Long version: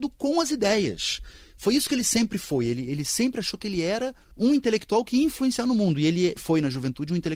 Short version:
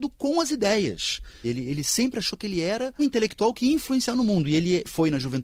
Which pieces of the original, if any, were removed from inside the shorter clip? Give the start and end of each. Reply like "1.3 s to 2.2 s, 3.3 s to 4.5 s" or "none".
1.4 s to 2.6 s, 4.2 s to 4.5 s